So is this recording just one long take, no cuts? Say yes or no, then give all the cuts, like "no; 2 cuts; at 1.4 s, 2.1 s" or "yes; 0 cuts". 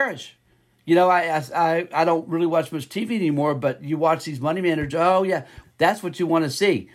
no; 1 cut; at 5.6 s